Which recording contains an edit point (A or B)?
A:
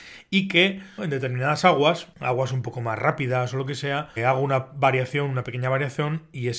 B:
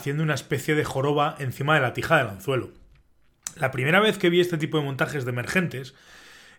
A